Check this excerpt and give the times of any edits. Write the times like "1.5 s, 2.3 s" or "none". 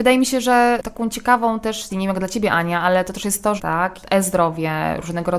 1.9 s, 3.6 s